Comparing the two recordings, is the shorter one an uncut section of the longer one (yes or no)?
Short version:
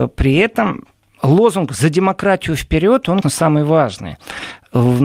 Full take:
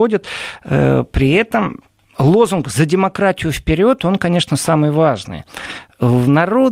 no